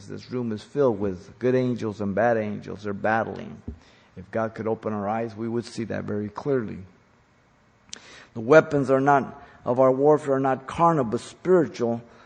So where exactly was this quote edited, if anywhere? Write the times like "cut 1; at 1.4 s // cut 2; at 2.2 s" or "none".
none

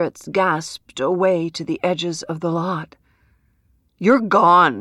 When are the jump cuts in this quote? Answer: cut 1; at 3.9 s

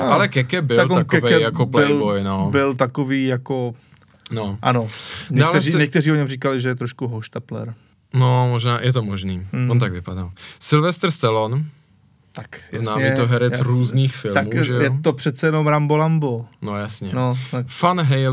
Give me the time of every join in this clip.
none

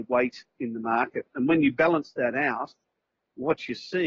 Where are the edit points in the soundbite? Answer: none

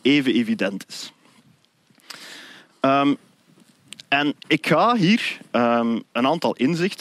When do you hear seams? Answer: cut 1; at 4.4 s

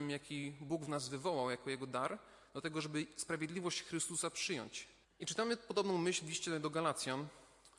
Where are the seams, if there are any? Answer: cut 1; at 5.0 s

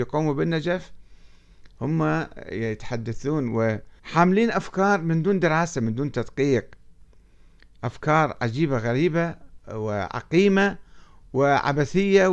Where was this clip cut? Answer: cut 1; at 4.0 s

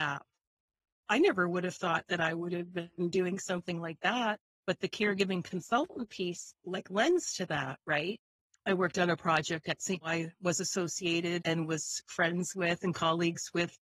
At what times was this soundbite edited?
cut 1; at 10.0 s // cut 2; at 11.4 s

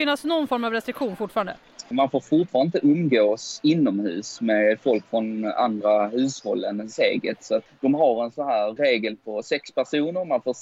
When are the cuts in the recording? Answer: cut 1; at 1.9 s // cut 2; at 7.7 s // cut 3; at 8.8 s

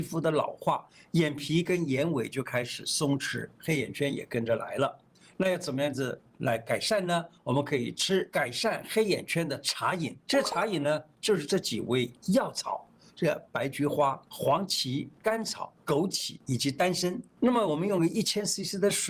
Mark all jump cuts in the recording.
none

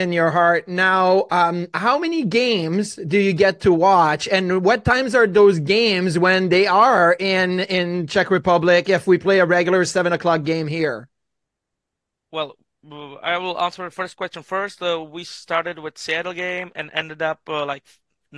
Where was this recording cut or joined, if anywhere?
none

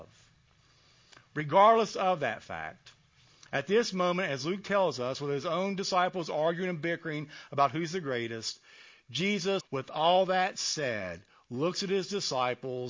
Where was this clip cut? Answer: cut 1; at 9.6 s

